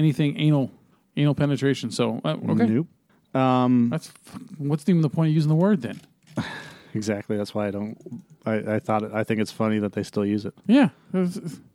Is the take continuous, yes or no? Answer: yes